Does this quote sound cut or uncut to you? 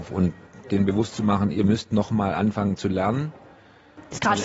uncut